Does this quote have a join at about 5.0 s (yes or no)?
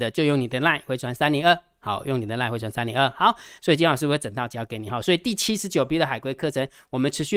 no